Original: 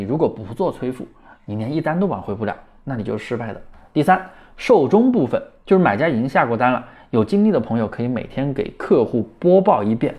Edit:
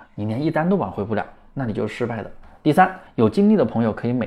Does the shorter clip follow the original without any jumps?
no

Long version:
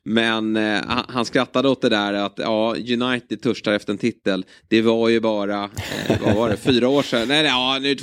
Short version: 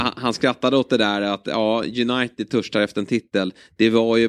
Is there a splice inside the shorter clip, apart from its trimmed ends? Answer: no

